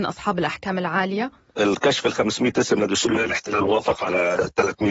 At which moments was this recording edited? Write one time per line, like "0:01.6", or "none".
0:03.2